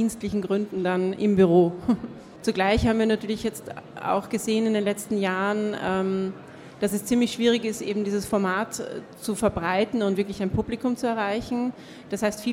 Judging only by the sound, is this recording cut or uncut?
cut